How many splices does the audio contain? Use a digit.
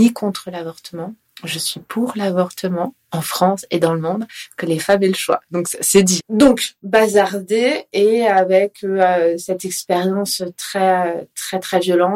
1